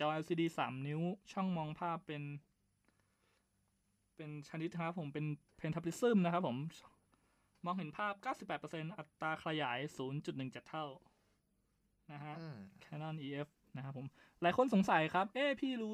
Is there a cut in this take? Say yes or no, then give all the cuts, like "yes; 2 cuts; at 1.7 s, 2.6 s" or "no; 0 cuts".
no; 0 cuts